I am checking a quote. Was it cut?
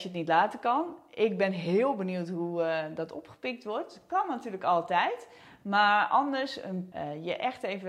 yes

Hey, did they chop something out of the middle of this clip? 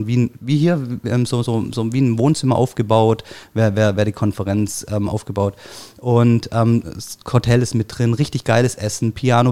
no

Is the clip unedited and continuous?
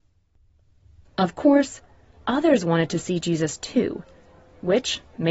no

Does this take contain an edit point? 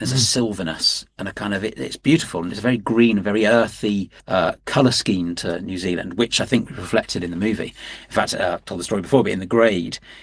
yes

